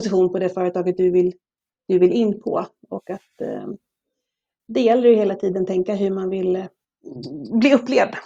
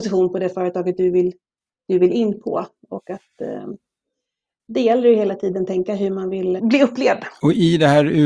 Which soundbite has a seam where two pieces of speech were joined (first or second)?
second